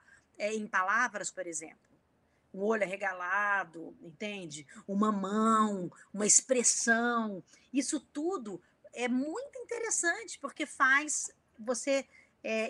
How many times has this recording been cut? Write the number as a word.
one